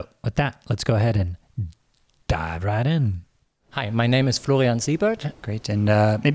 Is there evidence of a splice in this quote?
yes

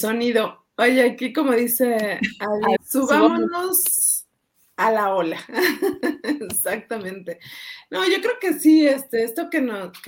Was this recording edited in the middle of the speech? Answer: yes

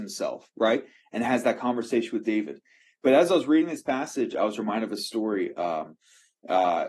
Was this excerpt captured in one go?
yes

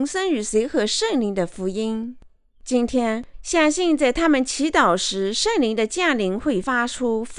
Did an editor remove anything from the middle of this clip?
yes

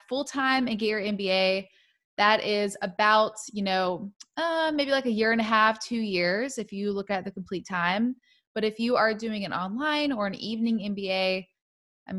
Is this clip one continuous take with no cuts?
yes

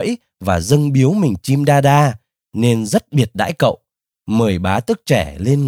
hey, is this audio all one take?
yes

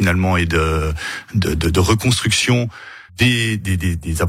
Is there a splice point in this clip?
yes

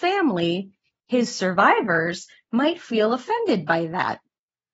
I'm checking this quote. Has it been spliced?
no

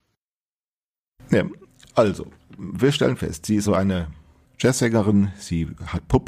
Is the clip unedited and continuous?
no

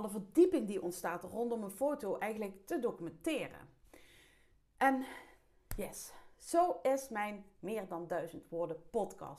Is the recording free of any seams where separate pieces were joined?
yes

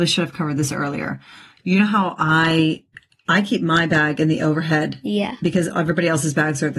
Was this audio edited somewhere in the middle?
no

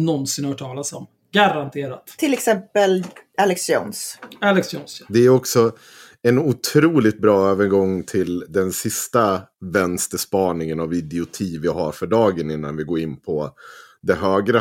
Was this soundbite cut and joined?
no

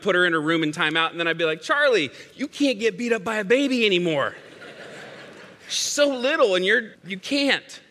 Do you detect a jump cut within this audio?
yes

